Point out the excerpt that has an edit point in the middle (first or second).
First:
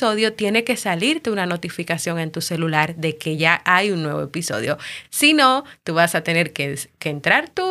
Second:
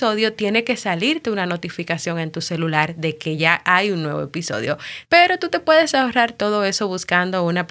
second